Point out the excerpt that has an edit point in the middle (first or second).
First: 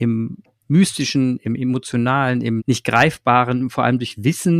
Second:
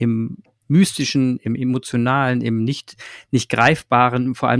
first